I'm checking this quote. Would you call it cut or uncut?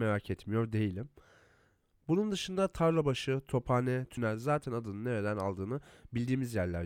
cut